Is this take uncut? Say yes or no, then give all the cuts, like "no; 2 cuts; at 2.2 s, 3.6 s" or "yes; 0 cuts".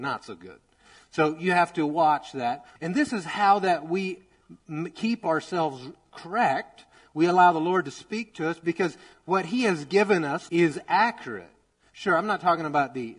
no; 2 cuts; at 2.8 s, 10.5 s